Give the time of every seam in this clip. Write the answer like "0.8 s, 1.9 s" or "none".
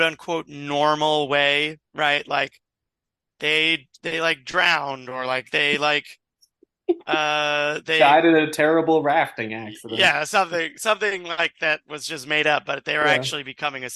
none